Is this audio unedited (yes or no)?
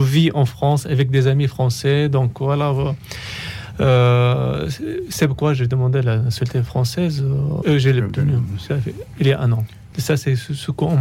no